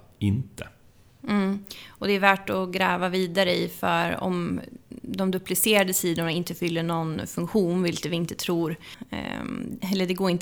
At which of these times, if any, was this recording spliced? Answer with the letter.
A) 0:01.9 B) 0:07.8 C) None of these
C